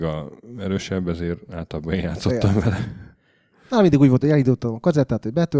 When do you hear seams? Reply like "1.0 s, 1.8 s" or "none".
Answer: none